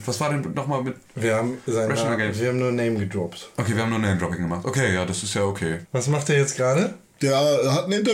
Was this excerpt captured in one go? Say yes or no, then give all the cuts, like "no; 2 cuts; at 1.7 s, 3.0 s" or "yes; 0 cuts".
no; 2 cuts; at 1.0 s, 5.8 s